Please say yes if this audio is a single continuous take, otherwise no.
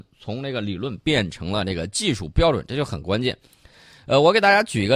yes